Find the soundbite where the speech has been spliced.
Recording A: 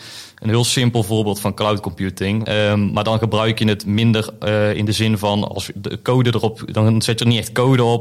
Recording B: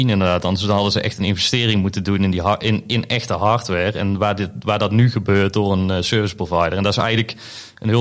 A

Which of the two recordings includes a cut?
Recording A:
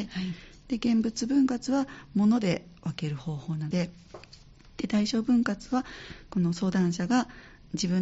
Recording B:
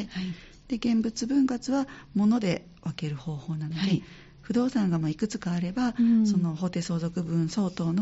A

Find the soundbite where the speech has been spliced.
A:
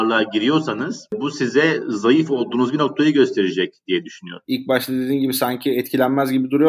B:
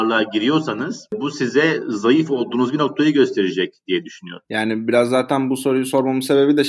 A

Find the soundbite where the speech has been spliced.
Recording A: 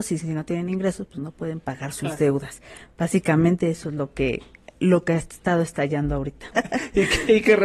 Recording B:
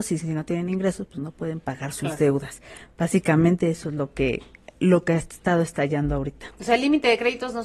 A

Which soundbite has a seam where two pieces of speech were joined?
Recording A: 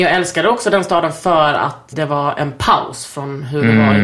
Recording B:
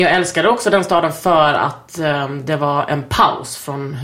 A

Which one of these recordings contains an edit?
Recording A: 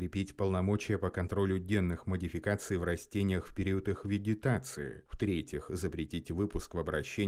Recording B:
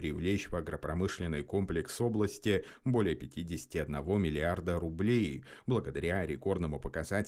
A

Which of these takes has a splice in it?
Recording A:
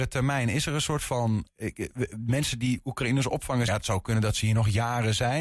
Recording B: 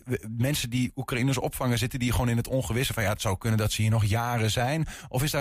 A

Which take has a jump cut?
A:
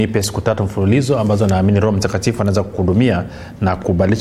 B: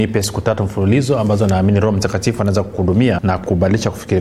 B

